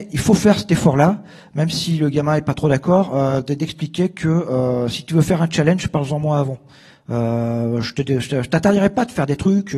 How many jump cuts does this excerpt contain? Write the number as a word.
zero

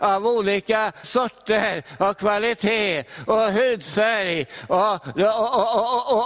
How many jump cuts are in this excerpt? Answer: one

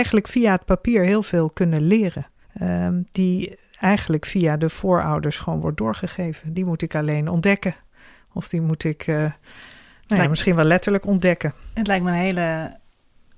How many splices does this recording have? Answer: two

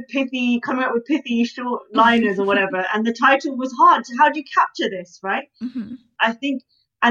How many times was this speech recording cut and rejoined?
one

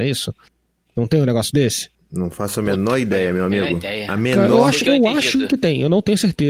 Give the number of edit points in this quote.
zero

